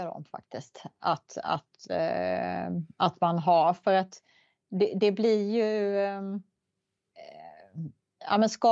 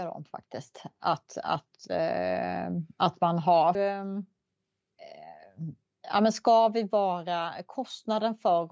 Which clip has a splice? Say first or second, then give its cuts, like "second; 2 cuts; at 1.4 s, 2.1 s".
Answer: second; 1 cut; at 3.7 s